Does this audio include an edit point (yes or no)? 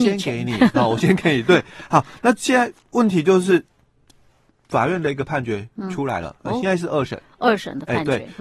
no